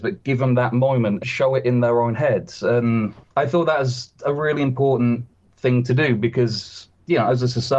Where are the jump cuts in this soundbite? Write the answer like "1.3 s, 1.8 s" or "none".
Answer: 1.2 s